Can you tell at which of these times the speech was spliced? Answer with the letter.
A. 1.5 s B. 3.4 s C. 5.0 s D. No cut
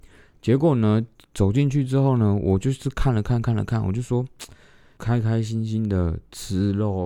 C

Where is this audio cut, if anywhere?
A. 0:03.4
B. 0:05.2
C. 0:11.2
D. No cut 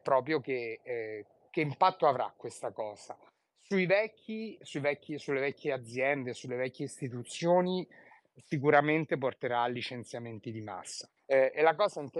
C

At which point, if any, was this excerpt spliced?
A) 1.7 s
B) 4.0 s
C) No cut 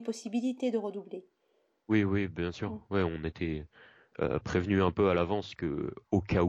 C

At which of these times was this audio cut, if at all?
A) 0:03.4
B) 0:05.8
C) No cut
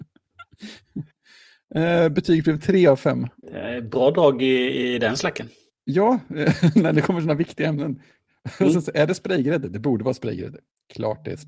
A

